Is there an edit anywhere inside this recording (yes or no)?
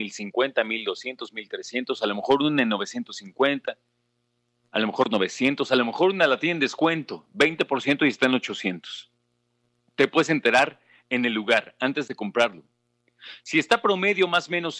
no